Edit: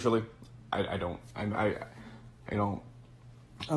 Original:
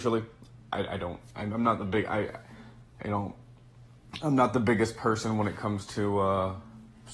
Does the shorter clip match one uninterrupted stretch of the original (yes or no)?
no